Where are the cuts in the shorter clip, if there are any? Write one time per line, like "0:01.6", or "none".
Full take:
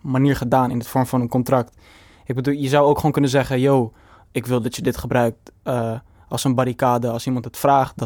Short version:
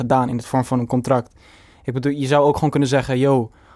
none